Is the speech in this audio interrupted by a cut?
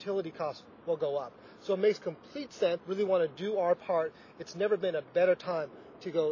yes; 1 cut; at 2.8 s

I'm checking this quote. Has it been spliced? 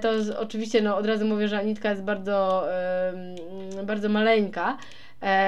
no; 0 cuts

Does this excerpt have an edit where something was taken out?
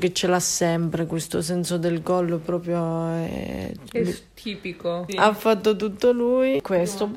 yes; 1 cut; at 5.1 s

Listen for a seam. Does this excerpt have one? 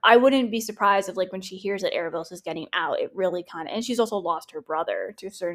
no; 0 cuts

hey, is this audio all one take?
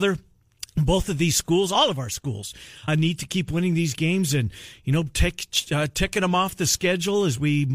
no; 1 cut; at 2.9 s

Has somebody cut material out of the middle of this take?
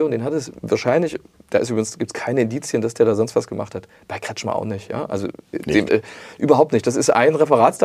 yes; 1 cut; at 5.9 s

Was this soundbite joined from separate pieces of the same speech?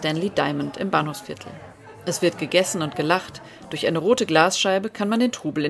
no; 0 cuts

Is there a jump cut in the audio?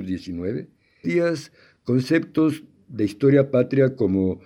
yes; 1 cut; at 1.0 s

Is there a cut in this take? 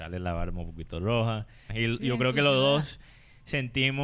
yes; 1 cut; at 1.7 s

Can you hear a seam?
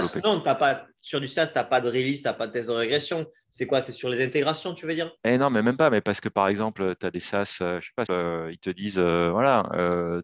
yes; 2 cuts; at 5.2 s, 8.1 s

